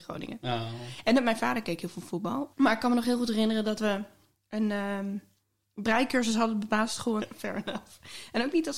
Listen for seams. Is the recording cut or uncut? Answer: cut